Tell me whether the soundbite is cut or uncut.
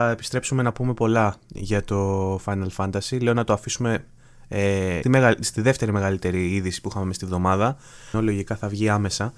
cut